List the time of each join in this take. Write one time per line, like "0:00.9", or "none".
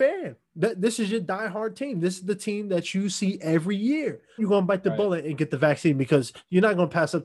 0:04.4